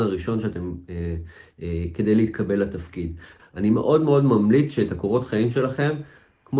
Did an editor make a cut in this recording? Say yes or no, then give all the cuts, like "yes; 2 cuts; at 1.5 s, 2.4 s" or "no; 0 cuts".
yes; 1 cut; at 3.4 s